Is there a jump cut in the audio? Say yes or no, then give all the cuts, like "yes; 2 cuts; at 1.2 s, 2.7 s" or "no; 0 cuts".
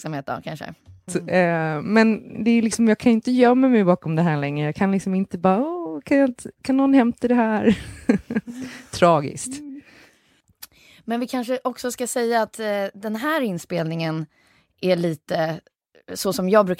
yes; 1 cut; at 1.1 s